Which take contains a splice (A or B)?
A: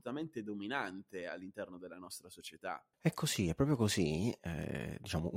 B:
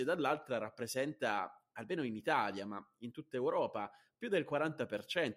A